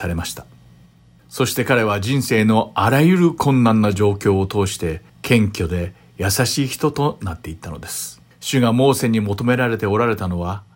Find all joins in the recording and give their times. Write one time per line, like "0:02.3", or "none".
0:01.2
0:05.1
0:08.3